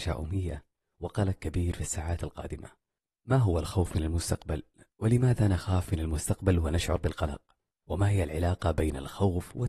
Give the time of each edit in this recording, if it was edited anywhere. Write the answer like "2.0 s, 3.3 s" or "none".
none